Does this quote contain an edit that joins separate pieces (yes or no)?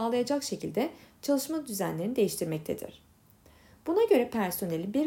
no